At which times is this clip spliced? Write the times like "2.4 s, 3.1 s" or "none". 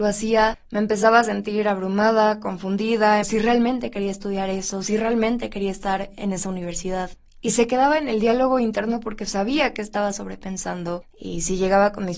3.2 s